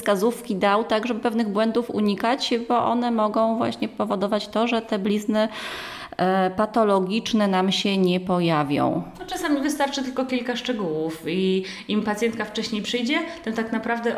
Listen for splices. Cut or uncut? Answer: uncut